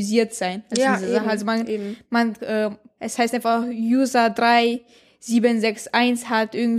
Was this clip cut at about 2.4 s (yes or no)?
yes